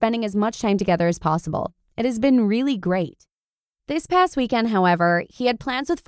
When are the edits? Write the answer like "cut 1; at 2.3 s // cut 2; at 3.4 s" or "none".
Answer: none